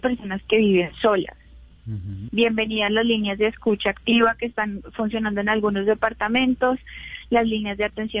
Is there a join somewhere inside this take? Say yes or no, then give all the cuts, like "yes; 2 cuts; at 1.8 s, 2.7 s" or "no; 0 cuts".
yes; 1 cut; at 2.3 s